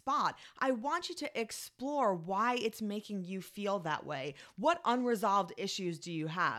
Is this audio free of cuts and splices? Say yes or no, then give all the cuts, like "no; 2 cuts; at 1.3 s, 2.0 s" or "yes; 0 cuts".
yes; 0 cuts